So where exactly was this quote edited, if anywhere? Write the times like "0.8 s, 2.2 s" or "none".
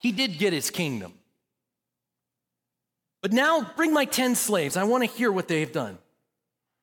none

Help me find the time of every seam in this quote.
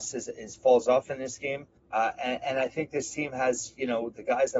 1.8 s

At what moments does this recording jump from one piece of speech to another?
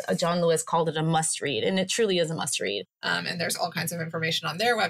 2.8 s

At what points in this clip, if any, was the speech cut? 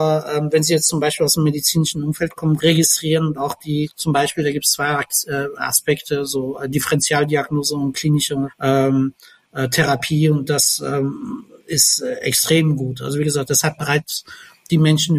2.6 s

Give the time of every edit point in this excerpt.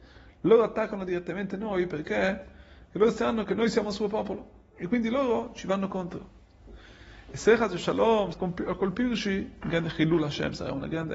8.3 s, 9.6 s

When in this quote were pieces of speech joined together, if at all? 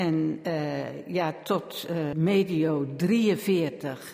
2.1 s

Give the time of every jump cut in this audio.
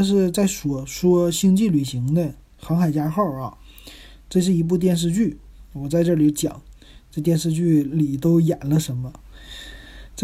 none

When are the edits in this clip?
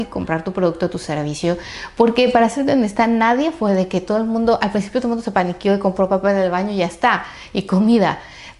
none

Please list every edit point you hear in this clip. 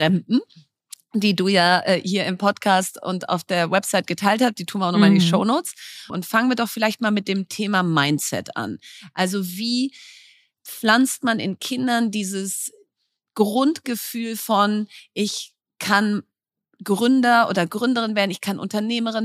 6.1 s

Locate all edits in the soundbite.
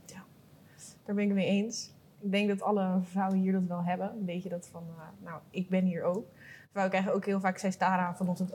none

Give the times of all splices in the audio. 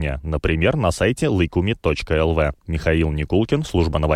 2.6 s

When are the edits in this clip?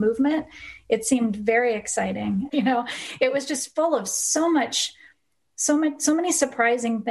2.5 s

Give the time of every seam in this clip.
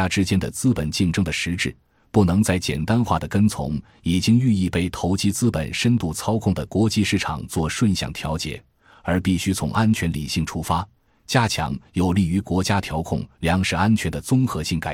none

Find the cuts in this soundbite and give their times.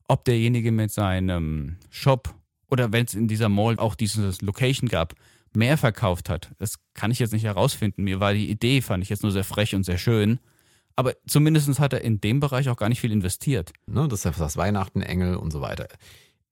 3.8 s, 13.9 s

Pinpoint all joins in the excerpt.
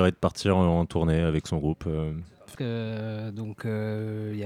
2.6 s

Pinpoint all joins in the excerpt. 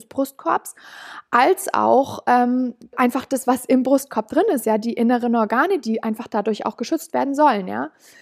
2.9 s

